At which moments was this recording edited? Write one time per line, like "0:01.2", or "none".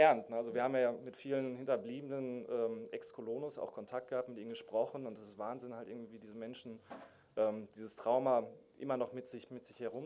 none